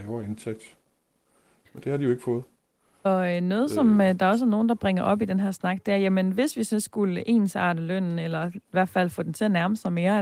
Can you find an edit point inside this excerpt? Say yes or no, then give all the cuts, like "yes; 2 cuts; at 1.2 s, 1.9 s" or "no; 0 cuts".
no; 0 cuts